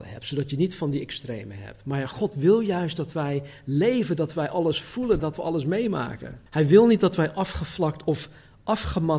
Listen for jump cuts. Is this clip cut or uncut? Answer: cut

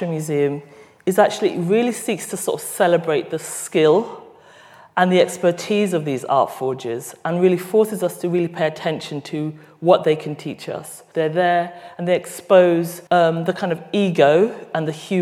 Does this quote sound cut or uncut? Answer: cut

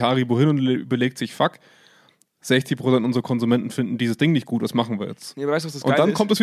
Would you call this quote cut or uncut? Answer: uncut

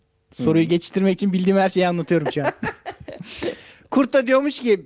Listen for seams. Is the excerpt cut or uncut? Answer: uncut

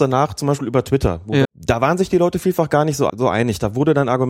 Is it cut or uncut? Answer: cut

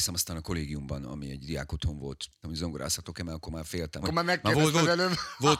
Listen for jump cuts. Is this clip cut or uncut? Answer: cut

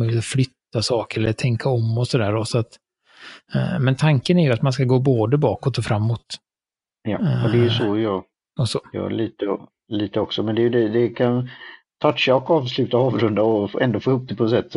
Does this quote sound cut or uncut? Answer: uncut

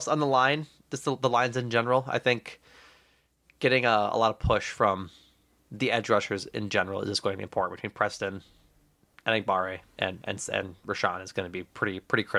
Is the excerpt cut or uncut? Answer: uncut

